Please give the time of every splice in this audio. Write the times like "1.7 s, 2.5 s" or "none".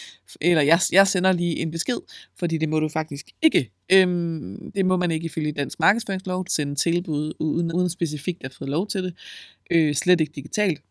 6.4 s, 7.7 s